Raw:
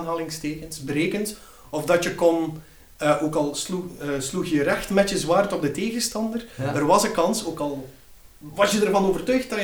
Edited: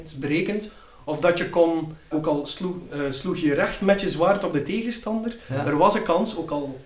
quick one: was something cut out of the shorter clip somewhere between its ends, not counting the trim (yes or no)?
yes